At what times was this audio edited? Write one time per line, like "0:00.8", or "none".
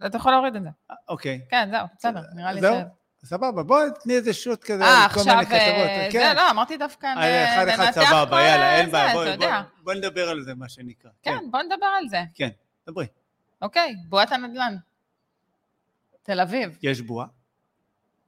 none